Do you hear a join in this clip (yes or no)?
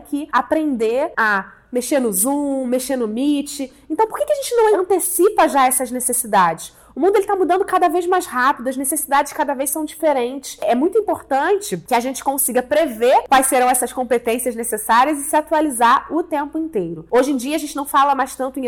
no